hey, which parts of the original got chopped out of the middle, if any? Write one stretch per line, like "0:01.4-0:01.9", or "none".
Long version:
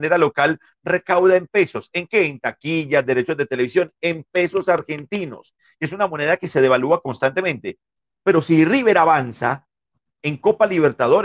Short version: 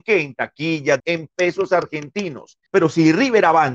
0:03.0-0:04.0
0:05.6-0:08.2